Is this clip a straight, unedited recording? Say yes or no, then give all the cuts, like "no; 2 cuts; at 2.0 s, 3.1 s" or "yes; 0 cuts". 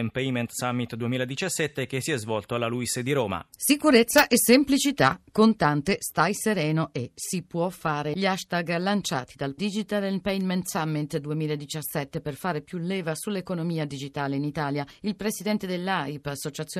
no; 1 cut; at 3.5 s